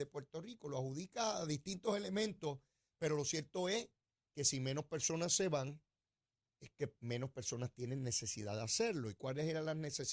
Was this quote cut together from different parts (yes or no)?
no